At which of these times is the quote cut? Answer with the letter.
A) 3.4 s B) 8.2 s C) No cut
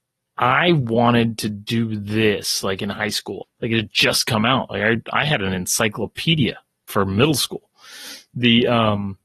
A